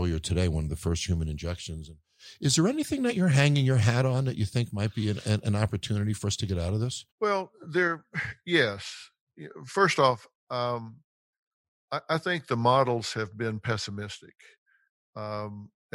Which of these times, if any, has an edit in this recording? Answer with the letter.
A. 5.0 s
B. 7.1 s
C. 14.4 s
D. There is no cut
B